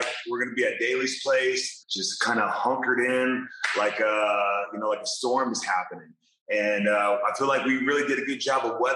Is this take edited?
yes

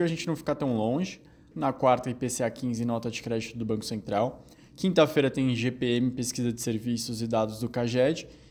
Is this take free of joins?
no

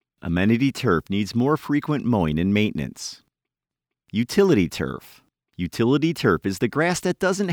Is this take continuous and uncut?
yes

